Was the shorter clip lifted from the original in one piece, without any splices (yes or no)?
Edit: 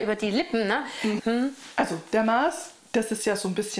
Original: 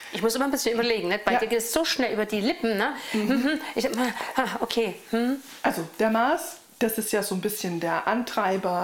no